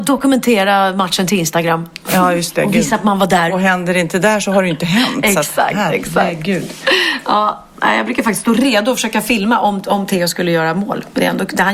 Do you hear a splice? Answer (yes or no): no